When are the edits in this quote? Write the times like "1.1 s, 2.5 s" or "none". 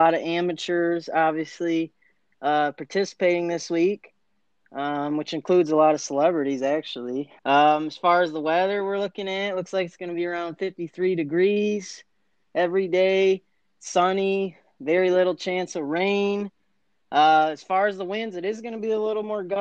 7.4 s